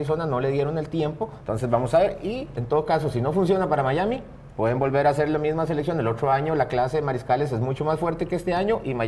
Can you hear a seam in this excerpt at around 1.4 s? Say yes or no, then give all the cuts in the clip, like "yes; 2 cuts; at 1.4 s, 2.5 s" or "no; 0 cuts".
yes; 1 cut; at 1.4 s